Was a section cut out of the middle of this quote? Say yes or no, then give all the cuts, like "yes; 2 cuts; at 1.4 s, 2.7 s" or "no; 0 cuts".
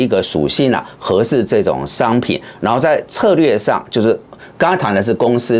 no; 0 cuts